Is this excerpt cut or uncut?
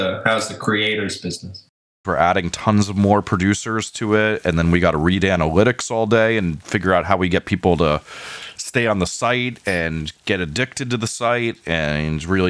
cut